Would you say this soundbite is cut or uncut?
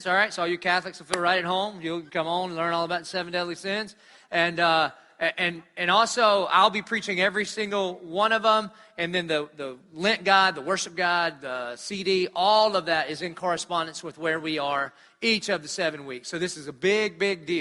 cut